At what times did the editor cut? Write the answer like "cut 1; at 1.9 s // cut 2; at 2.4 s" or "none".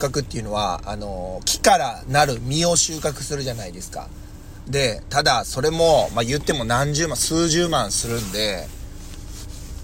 cut 1; at 4.6 s